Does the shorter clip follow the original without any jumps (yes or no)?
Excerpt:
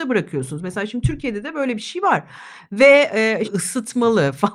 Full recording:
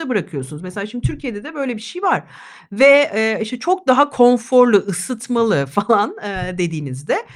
no